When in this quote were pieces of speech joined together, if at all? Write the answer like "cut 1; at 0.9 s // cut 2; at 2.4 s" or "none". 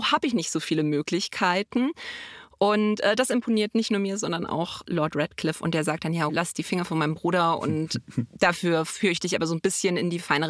cut 1; at 6.3 s